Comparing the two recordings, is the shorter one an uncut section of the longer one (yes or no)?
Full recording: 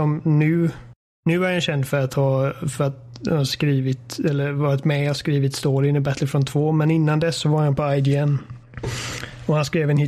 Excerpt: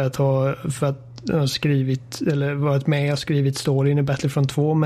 yes